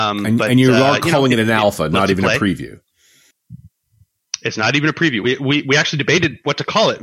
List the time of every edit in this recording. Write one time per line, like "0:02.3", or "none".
none